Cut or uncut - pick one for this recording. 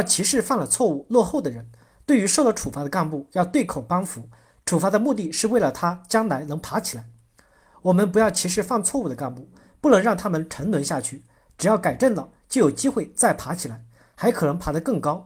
uncut